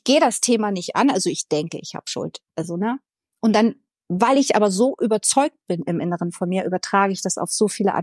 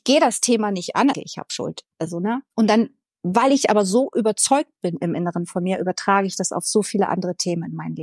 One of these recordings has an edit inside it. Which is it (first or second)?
second